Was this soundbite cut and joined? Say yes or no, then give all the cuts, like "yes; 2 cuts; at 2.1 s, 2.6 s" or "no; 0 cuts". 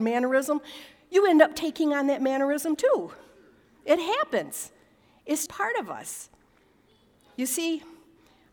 yes; 1 cut; at 5.5 s